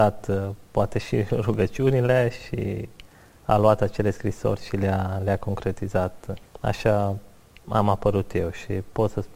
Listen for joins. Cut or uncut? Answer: uncut